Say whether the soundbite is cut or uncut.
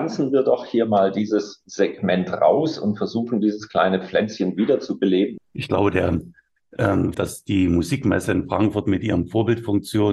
cut